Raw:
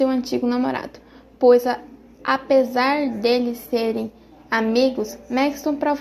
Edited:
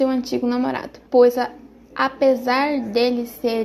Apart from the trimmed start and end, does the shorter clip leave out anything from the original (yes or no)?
yes